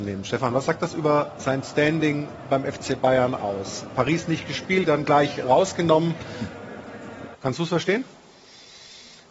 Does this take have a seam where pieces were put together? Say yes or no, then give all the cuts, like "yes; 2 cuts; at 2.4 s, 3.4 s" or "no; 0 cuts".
yes; 2 cuts; at 4.8 s, 7.3 s